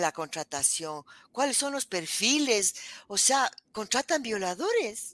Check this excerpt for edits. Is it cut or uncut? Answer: uncut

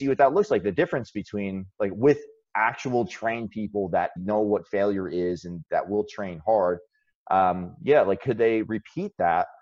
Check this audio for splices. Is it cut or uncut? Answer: cut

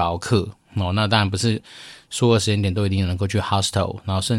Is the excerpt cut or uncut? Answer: uncut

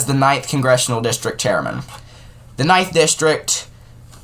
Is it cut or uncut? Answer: uncut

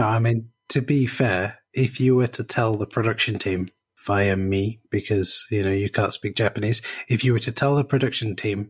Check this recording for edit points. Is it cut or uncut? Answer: uncut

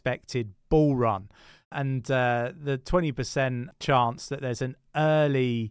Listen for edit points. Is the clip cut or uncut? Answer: uncut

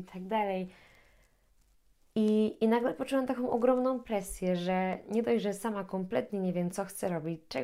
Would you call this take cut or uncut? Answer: uncut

